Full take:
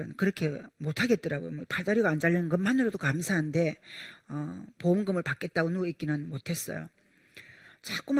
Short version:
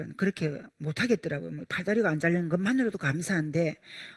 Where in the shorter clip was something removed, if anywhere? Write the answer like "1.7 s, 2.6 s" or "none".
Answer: none